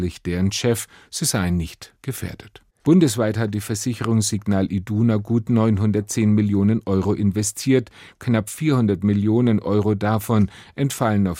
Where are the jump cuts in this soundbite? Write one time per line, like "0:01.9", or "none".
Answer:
0:02.8